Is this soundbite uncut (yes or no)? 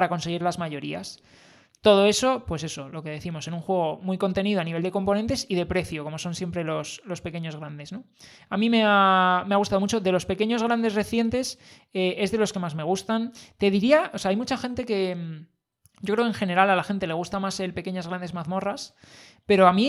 yes